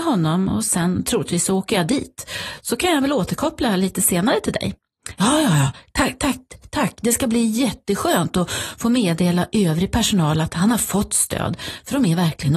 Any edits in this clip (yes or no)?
no